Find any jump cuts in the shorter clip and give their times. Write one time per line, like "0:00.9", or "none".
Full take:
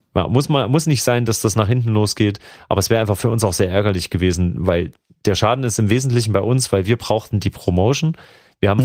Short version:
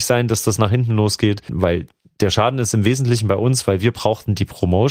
0:01.5